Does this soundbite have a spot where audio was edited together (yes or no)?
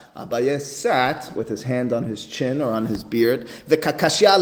yes